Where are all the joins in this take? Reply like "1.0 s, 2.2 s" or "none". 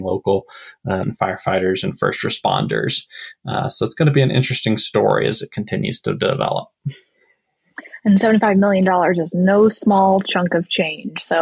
1.0 s